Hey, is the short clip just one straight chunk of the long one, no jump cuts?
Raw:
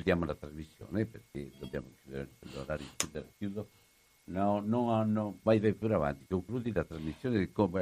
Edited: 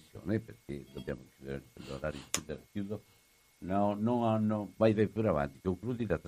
yes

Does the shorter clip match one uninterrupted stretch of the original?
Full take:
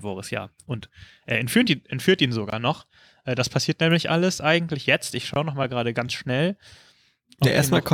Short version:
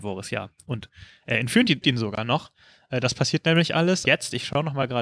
no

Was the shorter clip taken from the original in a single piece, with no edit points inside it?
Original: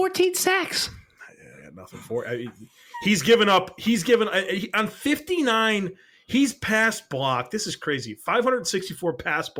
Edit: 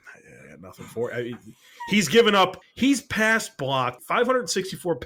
no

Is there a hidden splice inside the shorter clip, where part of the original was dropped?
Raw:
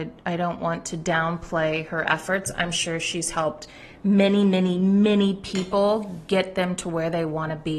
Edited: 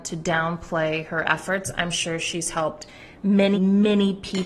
yes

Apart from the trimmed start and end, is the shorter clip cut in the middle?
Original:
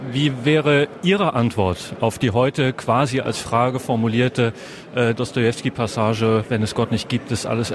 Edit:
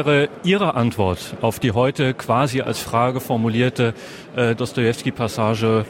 no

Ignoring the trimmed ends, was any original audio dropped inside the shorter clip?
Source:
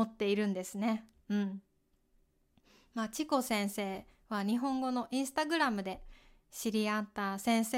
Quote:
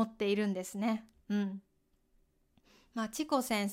no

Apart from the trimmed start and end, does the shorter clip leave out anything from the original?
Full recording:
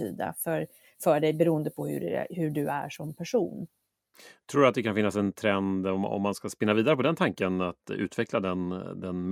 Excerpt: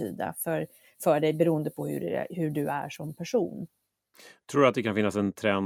no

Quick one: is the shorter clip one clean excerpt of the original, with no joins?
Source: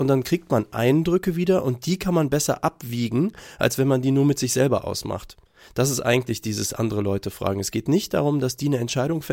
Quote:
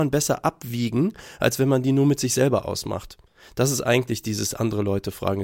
yes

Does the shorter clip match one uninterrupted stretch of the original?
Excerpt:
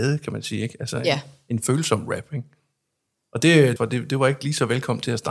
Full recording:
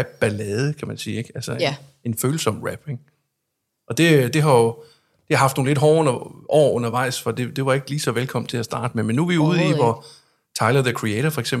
no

